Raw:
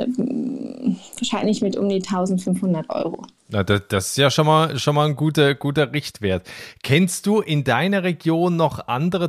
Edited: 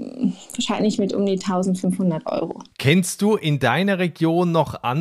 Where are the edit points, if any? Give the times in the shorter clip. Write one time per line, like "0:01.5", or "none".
0:02.7